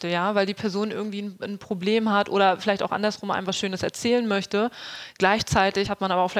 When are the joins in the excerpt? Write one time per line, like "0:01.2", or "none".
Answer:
none

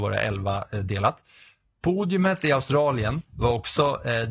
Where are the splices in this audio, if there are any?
none

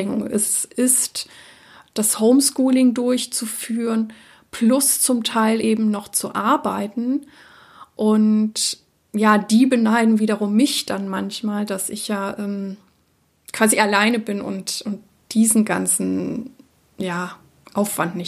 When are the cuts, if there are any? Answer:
none

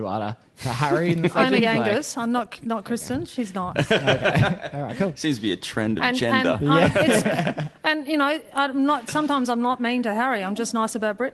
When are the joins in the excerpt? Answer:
none

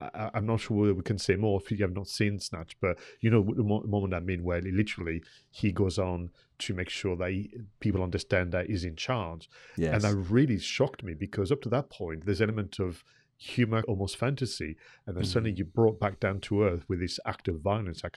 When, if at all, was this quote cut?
0:13.8

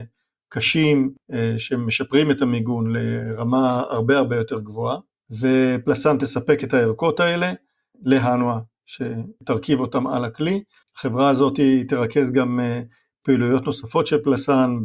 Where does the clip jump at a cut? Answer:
0:10.8

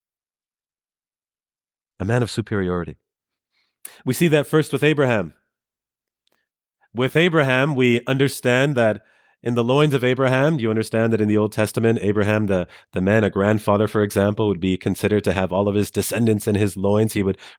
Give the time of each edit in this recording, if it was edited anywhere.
none

